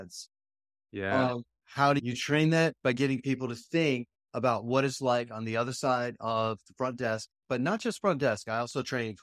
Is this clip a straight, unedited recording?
no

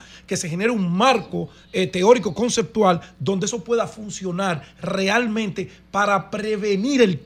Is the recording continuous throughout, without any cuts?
yes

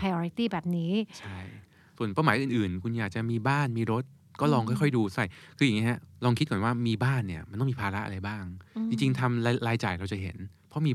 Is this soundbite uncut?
yes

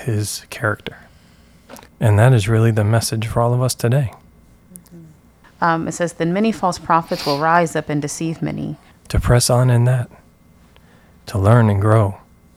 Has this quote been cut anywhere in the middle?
yes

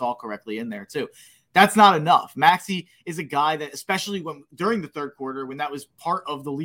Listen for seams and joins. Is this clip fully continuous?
yes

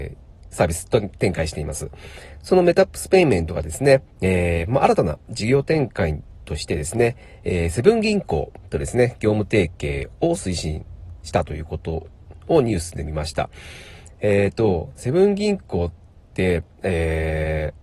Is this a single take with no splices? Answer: no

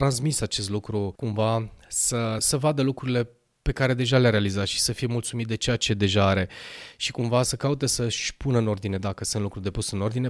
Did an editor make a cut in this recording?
yes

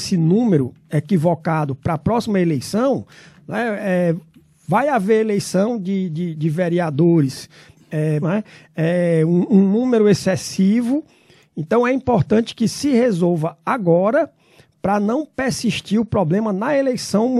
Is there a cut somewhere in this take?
yes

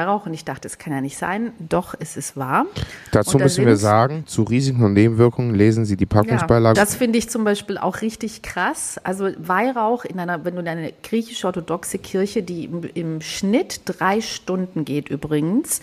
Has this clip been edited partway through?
yes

